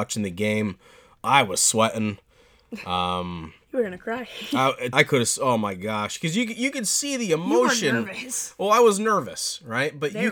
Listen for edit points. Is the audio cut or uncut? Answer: cut